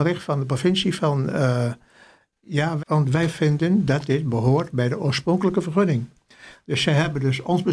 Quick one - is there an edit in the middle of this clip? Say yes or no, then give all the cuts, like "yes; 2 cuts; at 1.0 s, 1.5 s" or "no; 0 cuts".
yes; 1 cut; at 2.8 s